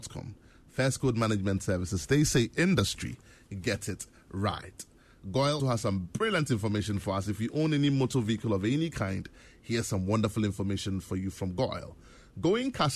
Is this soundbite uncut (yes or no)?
no